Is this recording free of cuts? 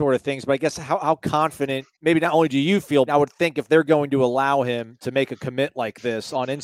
no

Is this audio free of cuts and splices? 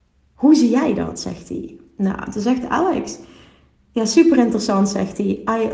yes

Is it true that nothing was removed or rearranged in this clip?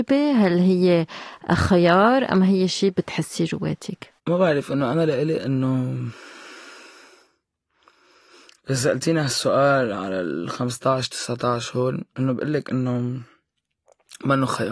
no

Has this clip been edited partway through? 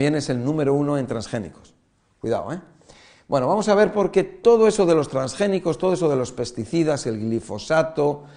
no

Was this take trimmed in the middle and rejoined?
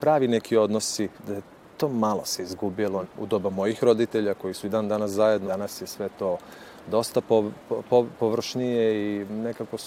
yes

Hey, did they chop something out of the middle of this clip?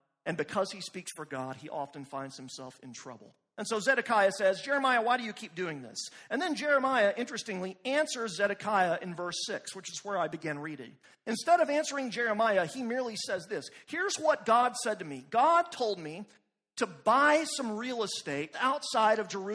yes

